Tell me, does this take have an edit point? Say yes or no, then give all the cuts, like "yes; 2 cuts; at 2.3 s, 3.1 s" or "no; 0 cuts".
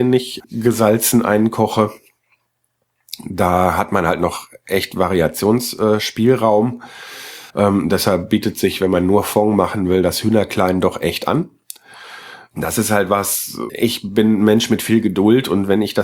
yes; 1 cut; at 7.5 s